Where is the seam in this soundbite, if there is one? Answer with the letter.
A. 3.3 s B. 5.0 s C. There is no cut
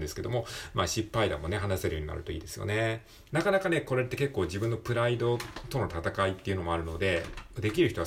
A